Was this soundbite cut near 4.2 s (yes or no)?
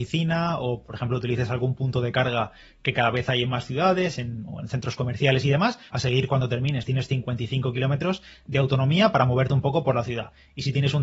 no